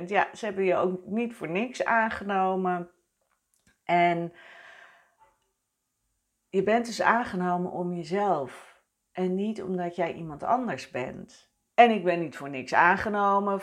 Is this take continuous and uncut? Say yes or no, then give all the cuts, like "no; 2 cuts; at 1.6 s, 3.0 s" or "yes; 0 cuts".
no; 1 cut; at 11.7 s